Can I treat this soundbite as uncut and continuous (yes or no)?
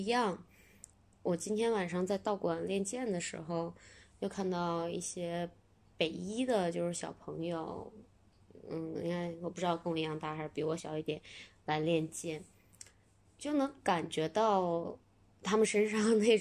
no